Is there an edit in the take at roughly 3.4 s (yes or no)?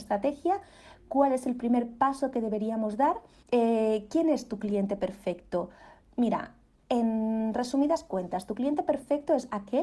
yes